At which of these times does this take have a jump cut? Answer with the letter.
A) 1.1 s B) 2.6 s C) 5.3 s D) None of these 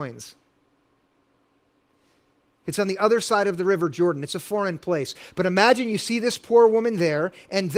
B